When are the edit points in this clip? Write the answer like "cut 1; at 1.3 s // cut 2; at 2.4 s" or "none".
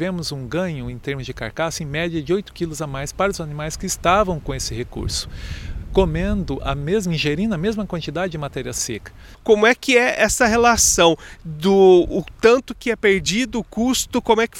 cut 1; at 9.3 s